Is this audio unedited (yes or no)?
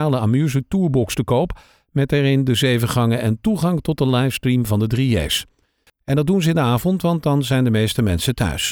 no